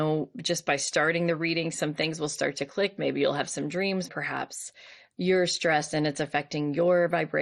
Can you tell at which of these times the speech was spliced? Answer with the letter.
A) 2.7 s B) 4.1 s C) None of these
B